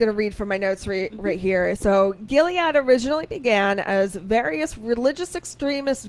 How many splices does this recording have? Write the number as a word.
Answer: zero